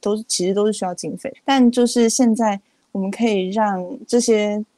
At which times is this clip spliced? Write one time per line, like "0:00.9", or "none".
0:01.3